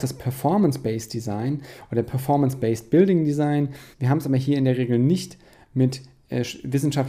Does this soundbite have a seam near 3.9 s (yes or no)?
yes